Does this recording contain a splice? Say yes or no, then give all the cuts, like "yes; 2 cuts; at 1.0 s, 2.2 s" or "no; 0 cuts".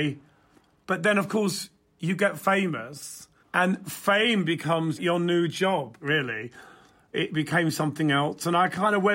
yes; 1 cut; at 6.0 s